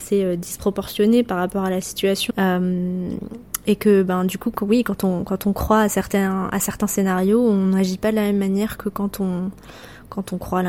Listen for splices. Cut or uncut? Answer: cut